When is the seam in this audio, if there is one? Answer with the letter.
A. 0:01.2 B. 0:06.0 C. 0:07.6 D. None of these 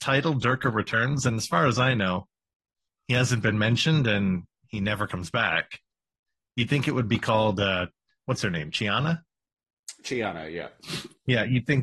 D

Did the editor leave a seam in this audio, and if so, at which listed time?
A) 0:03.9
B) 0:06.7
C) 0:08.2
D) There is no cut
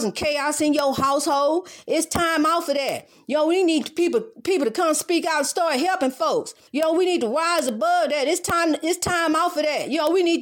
B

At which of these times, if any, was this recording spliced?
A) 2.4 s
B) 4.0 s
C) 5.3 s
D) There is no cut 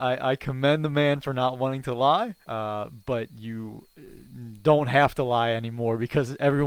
A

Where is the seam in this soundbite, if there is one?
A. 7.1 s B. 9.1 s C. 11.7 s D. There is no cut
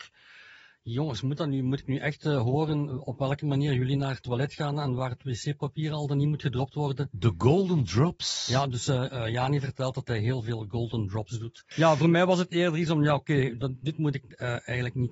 C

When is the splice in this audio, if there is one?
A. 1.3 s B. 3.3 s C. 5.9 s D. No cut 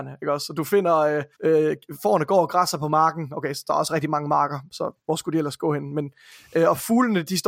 A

